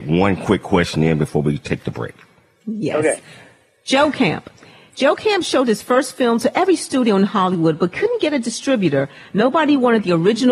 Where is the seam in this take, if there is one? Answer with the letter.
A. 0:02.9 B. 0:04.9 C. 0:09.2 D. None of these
D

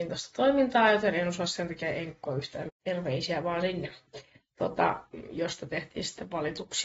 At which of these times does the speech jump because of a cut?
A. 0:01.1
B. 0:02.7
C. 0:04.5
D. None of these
B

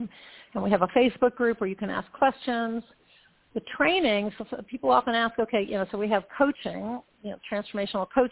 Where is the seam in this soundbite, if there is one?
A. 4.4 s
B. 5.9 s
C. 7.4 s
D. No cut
D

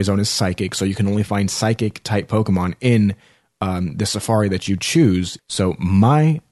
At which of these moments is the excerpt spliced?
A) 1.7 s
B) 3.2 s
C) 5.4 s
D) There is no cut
C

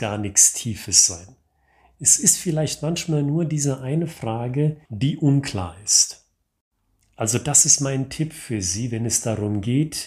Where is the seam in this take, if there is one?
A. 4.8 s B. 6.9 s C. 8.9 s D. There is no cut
A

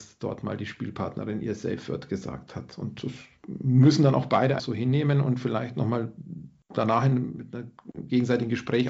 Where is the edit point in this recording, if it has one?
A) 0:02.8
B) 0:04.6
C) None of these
B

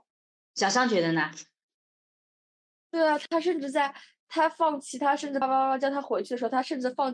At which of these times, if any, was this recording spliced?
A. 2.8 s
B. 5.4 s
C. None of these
B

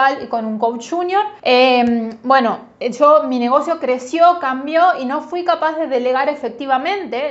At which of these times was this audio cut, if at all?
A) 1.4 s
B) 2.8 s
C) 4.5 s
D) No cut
A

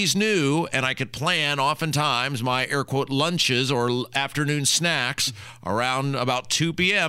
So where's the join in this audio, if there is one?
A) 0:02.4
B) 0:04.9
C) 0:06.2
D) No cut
D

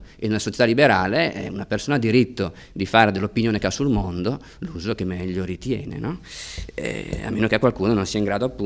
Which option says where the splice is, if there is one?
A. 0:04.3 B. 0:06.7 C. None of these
C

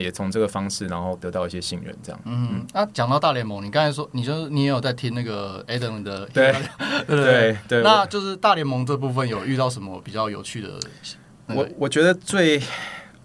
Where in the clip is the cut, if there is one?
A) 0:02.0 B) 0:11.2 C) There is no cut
C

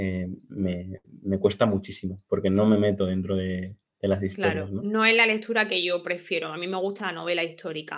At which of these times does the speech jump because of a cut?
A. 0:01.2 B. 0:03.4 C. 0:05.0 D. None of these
D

